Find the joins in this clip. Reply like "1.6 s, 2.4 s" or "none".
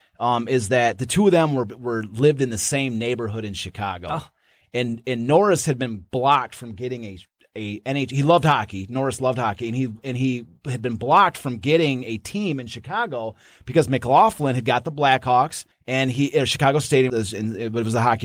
15.7 s, 17.1 s